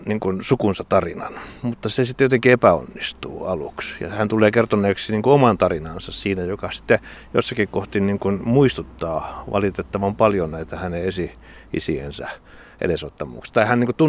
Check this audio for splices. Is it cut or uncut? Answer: uncut